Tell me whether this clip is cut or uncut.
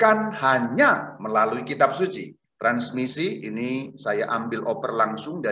cut